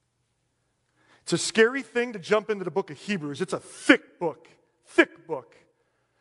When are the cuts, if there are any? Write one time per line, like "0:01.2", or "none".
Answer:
none

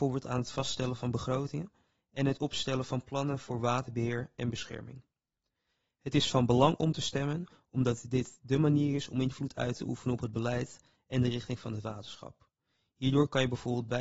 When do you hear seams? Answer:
none

